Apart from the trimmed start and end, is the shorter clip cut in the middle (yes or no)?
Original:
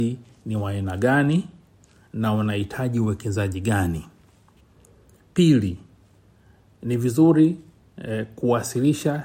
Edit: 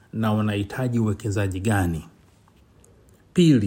no